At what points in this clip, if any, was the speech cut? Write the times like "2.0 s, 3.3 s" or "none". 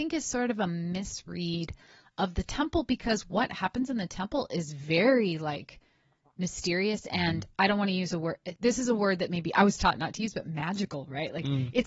none